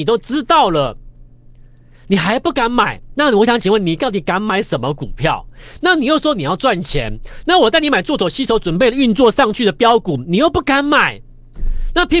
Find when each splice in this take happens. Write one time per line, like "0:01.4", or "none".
none